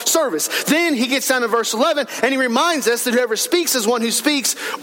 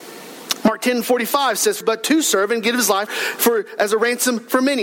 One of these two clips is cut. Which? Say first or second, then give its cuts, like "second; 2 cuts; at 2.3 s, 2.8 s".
second; 2 cuts; at 1.8 s, 3.1 s